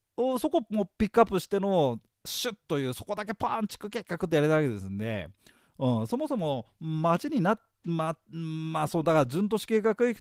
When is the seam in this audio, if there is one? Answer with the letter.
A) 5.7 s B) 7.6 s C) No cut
C